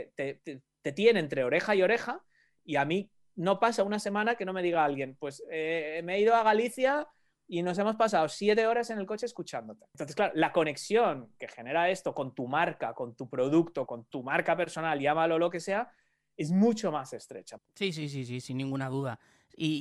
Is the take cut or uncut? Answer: cut